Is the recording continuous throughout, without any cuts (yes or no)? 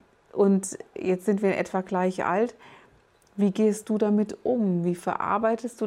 yes